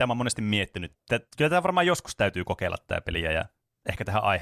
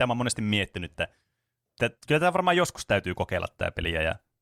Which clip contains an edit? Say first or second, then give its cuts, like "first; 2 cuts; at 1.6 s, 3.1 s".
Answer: first; 1 cut; at 0.9 s